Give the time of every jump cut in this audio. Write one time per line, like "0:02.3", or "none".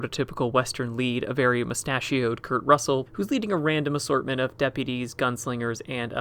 0:03.1